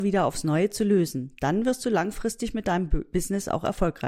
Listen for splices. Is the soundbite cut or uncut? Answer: uncut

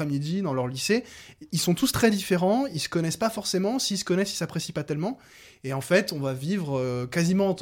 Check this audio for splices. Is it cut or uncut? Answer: uncut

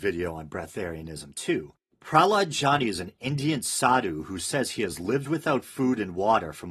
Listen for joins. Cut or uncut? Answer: uncut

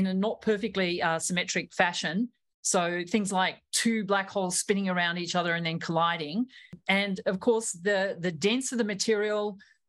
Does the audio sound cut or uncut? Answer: uncut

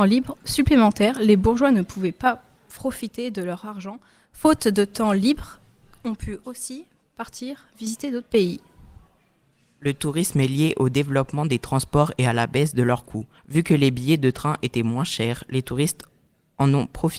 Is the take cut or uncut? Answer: cut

